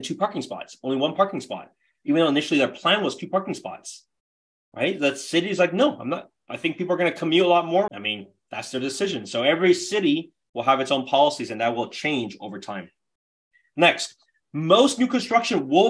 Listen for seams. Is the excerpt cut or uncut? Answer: cut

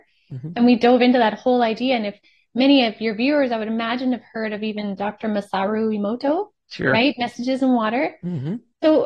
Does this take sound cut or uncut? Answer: uncut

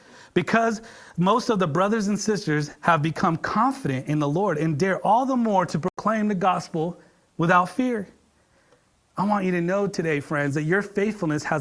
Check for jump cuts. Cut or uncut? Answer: uncut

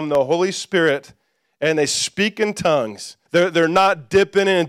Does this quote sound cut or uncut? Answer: cut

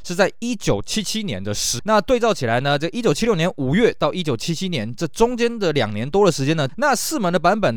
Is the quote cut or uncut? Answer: cut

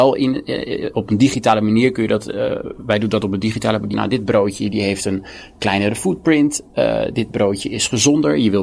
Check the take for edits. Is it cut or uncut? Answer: cut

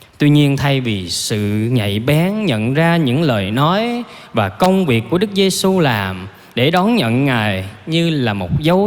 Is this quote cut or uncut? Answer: uncut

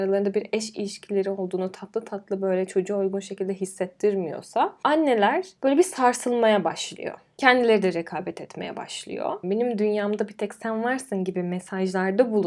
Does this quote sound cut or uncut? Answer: cut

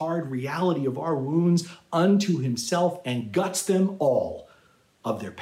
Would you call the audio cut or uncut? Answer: uncut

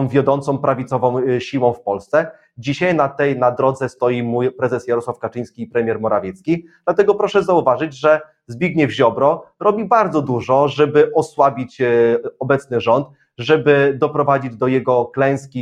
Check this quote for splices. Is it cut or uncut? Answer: uncut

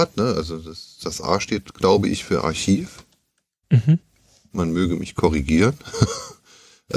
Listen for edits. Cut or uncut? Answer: uncut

